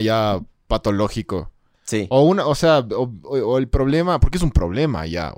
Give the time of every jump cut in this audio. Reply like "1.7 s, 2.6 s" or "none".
none